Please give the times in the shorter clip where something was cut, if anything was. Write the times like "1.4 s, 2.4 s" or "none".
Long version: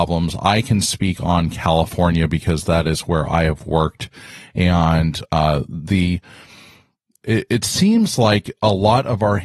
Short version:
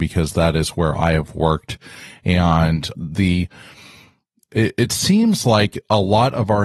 2.9 s